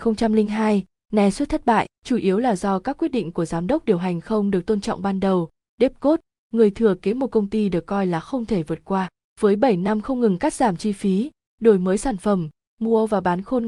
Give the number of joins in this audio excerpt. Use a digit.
1